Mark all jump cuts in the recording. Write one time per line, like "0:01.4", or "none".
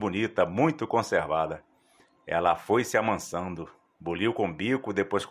none